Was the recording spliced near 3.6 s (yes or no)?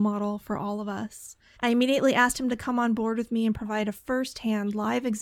no